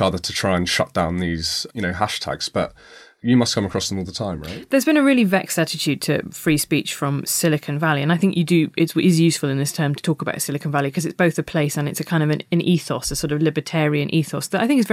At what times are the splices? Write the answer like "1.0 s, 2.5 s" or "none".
none